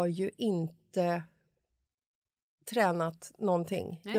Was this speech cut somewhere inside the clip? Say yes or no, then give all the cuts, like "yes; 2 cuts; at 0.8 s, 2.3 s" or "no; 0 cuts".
no; 0 cuts